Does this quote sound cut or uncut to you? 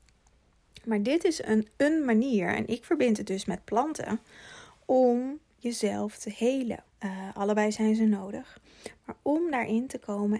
cut